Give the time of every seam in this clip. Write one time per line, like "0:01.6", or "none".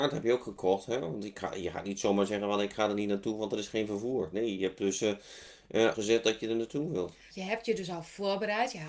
0:05.9
0:07.3